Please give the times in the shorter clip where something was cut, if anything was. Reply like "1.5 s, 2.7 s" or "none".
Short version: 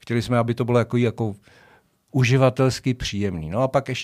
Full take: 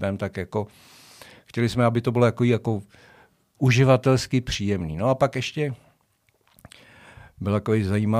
none

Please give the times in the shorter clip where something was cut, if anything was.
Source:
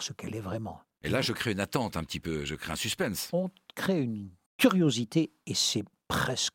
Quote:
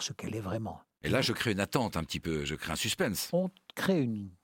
none

